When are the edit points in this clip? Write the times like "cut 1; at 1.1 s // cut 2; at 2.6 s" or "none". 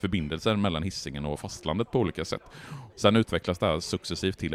cut 1; at 2.9 s